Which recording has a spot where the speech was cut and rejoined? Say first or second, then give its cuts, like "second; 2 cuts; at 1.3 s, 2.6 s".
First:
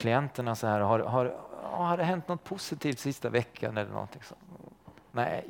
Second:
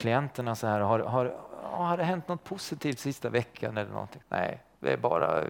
second; 1 cut; at 4.2 s